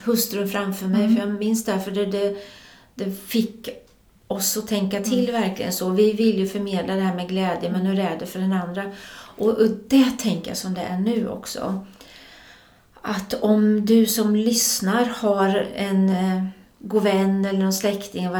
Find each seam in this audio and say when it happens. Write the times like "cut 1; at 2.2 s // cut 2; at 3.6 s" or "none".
none